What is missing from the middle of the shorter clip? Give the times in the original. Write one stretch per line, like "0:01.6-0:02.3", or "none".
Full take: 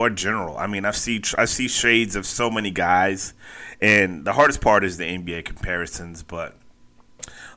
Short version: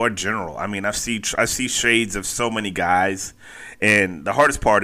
none